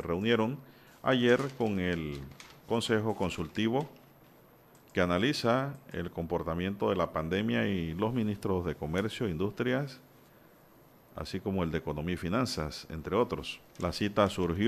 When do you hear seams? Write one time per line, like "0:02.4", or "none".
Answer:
0:13.7